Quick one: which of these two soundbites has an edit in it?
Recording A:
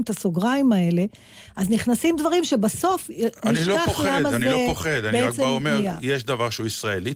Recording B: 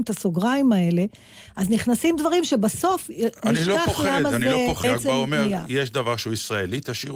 B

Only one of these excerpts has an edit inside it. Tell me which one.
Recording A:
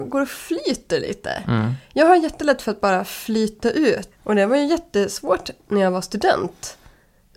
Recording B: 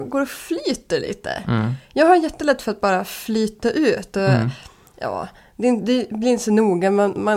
A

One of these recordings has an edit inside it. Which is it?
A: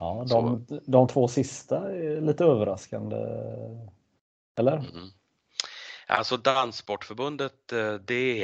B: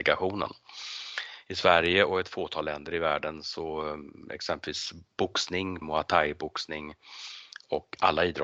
B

